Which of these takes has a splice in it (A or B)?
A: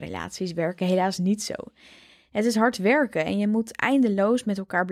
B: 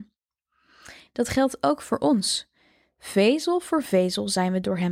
B